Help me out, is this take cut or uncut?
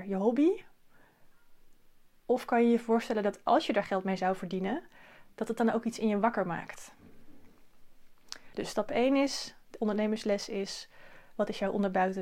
uncut